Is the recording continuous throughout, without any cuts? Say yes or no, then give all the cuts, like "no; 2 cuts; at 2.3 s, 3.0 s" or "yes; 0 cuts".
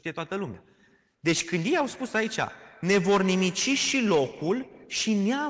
yes; 0 cuts